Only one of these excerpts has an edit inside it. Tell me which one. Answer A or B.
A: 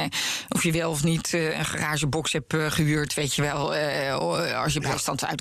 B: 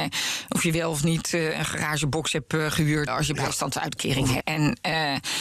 B